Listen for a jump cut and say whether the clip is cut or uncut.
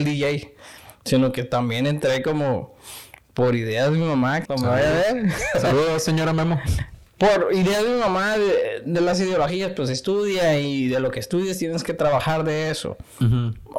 cut